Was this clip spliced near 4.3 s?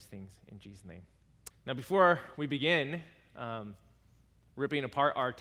no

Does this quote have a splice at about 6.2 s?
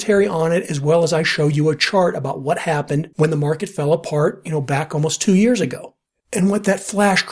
yes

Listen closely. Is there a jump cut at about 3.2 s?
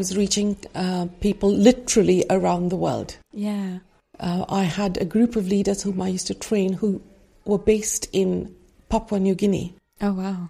no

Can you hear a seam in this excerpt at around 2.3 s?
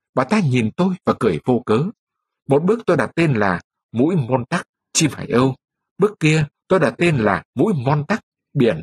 yes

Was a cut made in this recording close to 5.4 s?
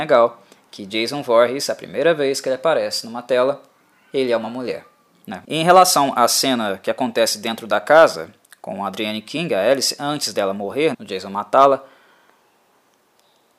yes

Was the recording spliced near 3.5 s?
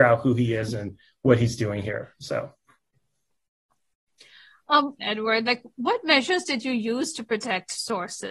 no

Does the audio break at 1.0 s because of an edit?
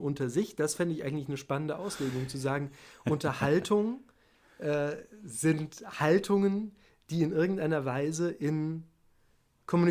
no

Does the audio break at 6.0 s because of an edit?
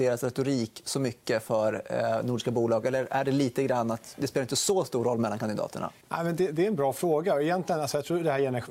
yes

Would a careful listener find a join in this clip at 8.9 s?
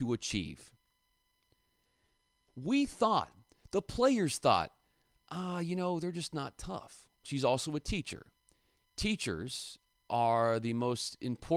no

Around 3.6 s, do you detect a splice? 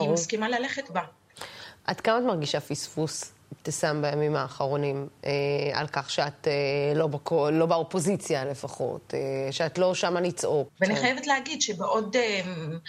no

